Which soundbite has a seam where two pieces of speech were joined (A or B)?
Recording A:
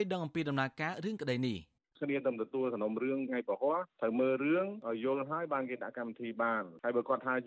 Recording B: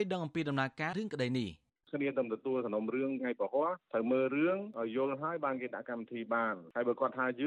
B